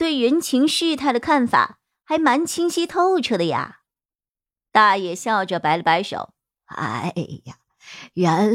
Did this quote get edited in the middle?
no; 0 cuts

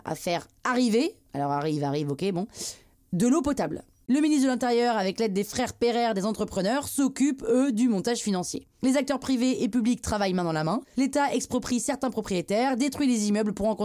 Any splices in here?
yes; 1 cut; at 4.1 s

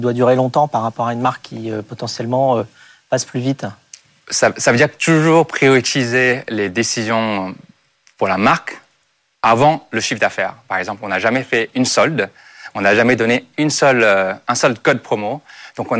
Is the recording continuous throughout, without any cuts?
yes; 0 cuts

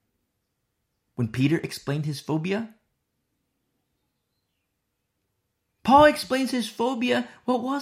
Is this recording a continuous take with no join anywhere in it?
yes; 0 cuts

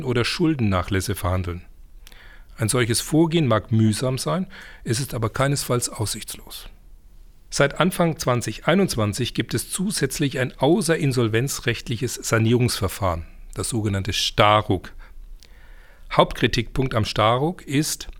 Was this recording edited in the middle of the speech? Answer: no; 0 cuts

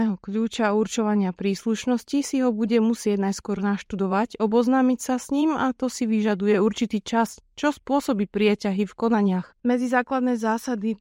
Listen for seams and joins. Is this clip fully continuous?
no; 1 cut; at 9.6 s

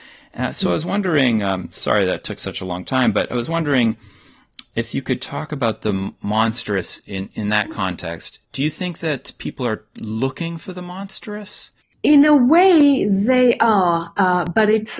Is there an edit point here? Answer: no; 0 cuts

